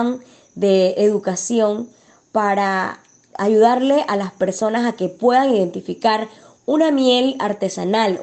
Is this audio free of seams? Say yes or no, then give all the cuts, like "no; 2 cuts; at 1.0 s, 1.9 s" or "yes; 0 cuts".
yes; 0 cuts